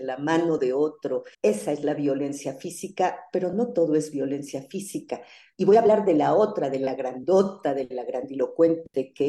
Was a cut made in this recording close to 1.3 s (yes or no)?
yes